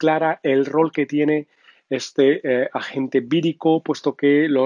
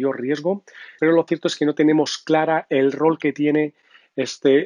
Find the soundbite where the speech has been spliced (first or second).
second